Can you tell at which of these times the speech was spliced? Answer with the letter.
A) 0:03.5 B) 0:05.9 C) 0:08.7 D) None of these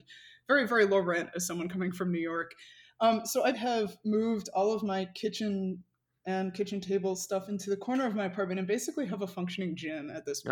A